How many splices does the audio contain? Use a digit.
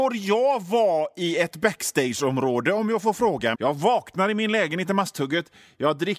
1